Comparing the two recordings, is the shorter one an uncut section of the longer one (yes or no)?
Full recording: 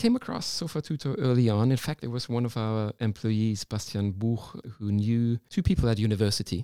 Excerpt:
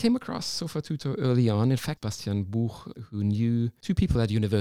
no